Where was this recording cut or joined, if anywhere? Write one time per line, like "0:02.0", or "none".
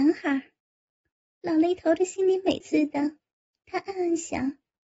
0:02.6